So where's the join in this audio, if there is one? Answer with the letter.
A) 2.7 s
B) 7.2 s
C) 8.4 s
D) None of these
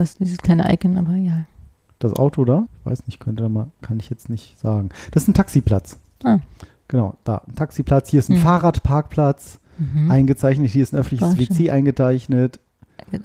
A